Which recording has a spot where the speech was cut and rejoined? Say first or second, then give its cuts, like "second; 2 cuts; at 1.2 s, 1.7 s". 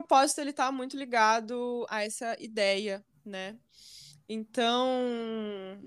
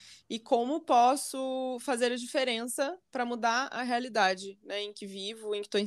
first; 1 cut; at 1.9 s